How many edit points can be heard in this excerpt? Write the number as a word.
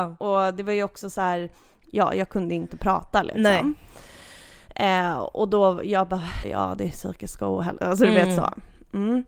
two